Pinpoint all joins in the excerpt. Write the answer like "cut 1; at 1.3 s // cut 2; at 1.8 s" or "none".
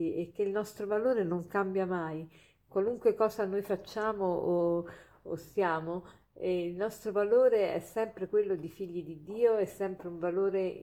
none